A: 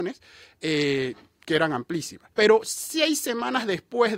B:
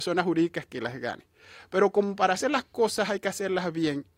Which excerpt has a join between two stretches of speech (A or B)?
A